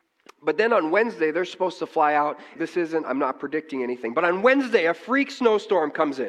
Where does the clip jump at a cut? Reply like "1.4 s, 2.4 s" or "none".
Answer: 2.6 s